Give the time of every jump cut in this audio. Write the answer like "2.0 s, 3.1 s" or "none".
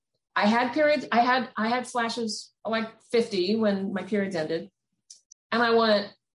2.6 s, 5.3 s

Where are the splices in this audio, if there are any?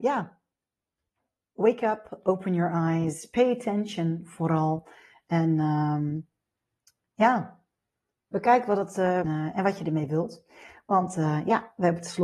9.3 s

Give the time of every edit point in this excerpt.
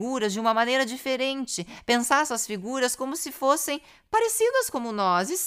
none

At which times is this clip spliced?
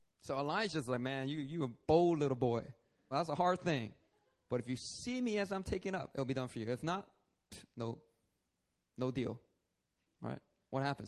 3.1 s

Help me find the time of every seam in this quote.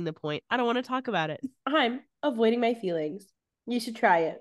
none

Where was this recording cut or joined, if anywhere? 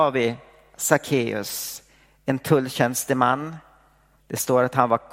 4.2 s

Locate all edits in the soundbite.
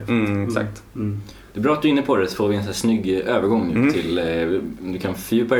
none

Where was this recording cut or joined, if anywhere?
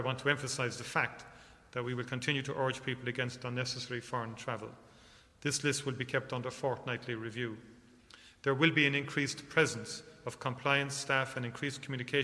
none

